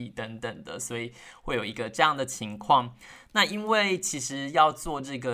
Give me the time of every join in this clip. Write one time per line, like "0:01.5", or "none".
none